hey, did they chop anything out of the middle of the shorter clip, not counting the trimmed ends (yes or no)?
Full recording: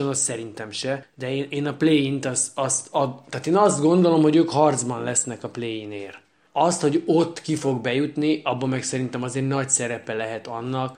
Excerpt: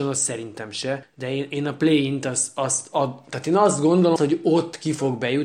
yes